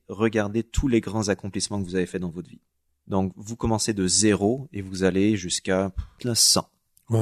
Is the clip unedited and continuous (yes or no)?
no